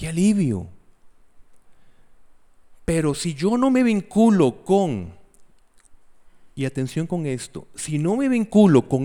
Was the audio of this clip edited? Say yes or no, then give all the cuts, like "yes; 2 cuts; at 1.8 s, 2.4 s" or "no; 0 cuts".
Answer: no; 0 cuts